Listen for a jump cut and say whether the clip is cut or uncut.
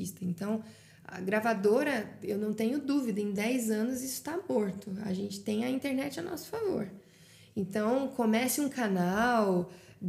uncut